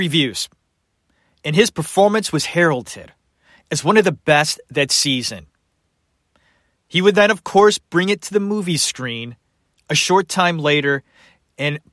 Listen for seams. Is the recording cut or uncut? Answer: uncut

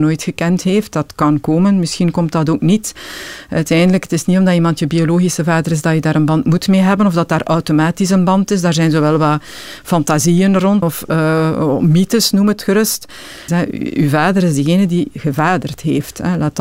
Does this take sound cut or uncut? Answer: cut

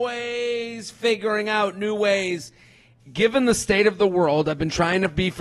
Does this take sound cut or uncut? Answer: cut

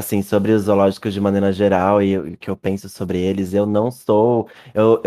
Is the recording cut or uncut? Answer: uncut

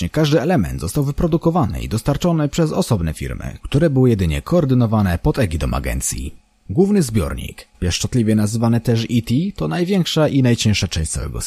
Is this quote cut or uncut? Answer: cut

